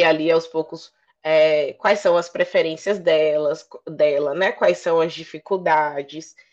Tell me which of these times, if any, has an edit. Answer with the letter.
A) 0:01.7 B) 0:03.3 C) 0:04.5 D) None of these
D